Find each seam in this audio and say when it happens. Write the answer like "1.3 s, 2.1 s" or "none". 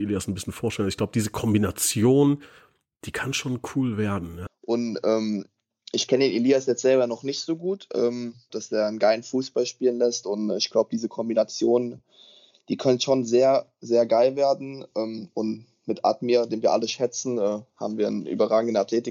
4.5 s, 8.5 s

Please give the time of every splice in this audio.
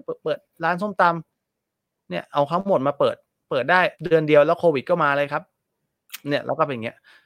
1.3 s, 3.9 s

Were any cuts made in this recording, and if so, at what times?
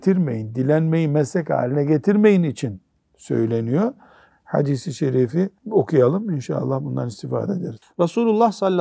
4.3 s, 5.6 s, 7.8 s

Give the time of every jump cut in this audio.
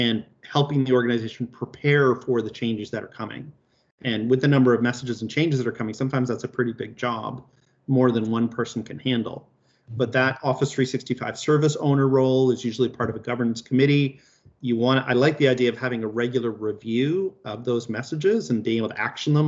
none

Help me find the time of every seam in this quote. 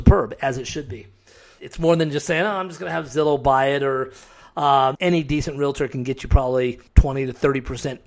1.6 s, 5.0 s, 6.9 s

